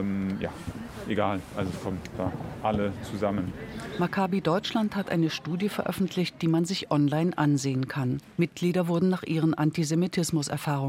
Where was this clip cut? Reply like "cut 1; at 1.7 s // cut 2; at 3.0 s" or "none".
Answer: cut 1; at 8.3 s

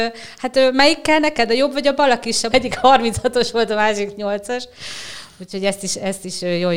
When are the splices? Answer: cut 1; at 2.5 s

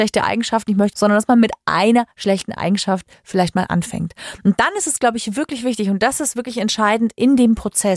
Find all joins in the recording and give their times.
cut 1; at 0.9 s

